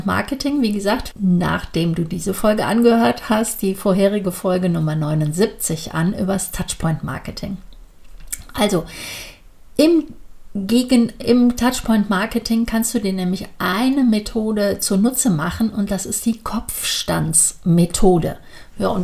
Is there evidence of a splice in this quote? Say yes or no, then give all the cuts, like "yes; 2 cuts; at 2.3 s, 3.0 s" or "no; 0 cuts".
yes; 2 cuts; at 1.1 s, 11.2 s